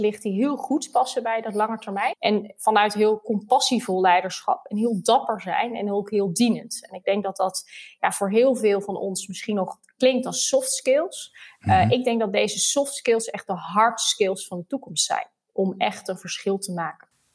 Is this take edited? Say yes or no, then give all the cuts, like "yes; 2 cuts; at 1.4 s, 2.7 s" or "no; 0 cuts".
yes; 1 cut; at 2.1 s